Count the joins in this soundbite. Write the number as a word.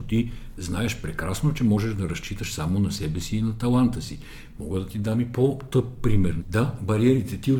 one